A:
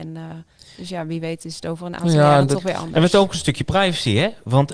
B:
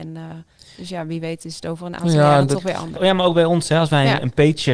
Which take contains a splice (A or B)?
B